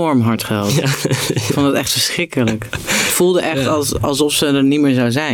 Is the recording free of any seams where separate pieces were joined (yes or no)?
yes